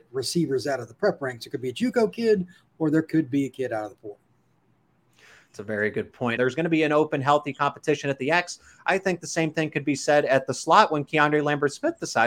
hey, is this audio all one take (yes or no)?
no